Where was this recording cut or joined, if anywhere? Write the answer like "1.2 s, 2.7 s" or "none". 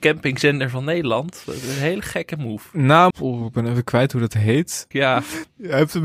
3.1 s, 4.9 s